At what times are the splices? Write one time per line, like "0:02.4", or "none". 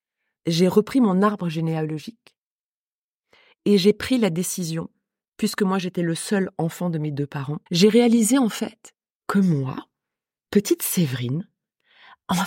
0:07.7